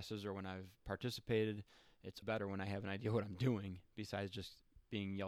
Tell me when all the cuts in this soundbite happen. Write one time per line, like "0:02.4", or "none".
0:02.2